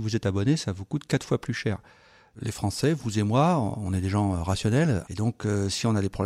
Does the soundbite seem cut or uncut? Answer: cut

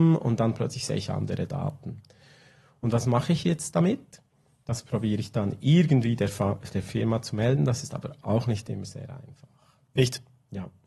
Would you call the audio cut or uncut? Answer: uncut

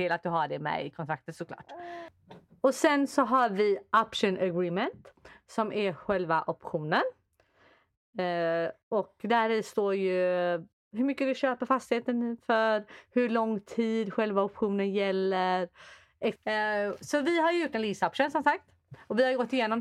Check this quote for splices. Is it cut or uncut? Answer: cut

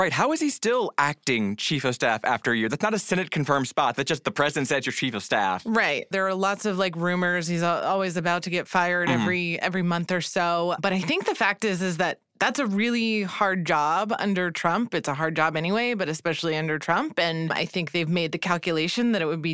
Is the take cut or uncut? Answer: cut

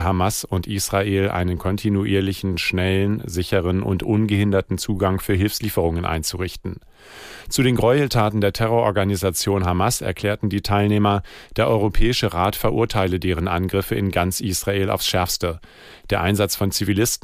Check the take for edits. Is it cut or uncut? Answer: uncut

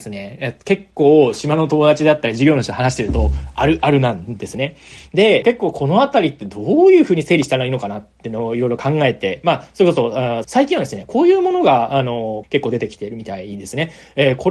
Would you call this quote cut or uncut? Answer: cut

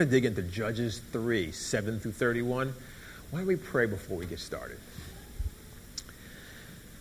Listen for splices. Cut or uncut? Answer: uncut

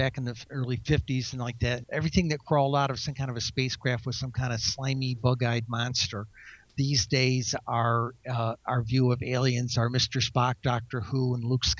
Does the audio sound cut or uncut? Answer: cut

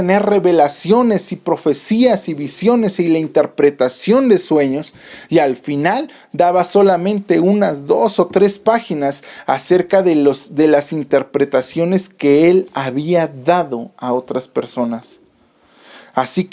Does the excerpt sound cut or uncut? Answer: uncut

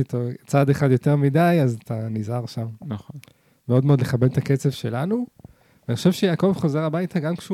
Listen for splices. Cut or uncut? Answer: uncut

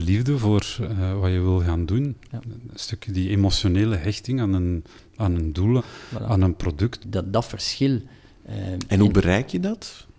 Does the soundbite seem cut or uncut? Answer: cut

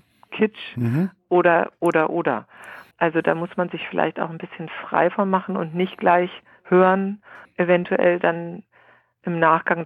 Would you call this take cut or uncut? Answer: cut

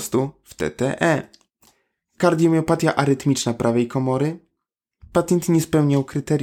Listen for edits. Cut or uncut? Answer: uncut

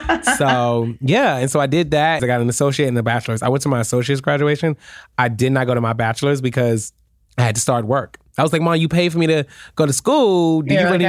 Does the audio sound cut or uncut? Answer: cut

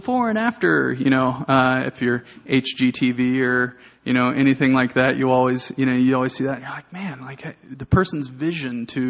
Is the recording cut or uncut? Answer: uncut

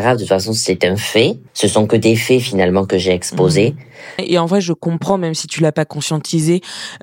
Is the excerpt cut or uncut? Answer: cut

